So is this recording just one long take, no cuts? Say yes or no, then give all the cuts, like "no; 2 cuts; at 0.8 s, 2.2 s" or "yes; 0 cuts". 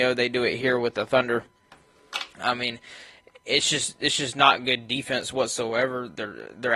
yes; 0 cuts